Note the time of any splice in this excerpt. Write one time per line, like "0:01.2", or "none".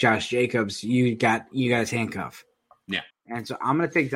0:03.1